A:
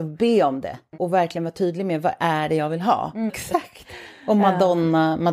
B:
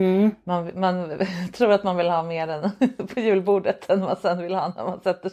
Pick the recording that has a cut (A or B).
A